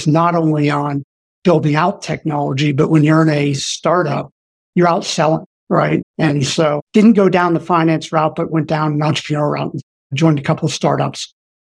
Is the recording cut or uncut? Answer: cut